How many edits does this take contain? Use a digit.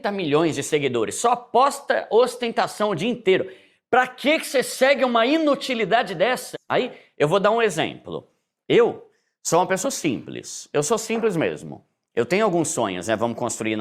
2